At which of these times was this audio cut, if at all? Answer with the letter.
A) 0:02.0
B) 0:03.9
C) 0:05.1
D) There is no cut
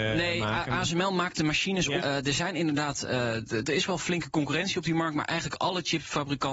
A